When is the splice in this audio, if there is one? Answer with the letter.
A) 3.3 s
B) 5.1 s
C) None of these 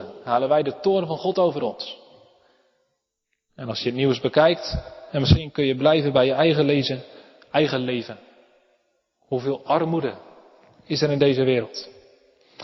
B